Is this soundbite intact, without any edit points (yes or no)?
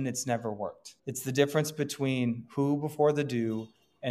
no